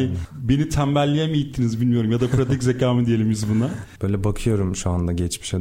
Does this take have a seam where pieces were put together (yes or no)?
yes